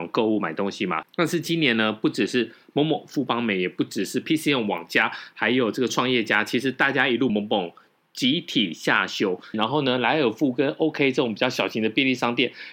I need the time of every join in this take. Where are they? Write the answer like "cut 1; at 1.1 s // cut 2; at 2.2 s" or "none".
cut 1; at 1.0 s // cut 2; at 7.3 s // cut 3; at 9.5 s